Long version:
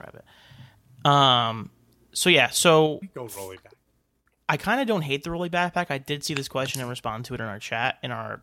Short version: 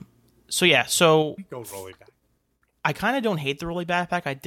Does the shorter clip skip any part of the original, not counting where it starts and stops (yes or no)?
no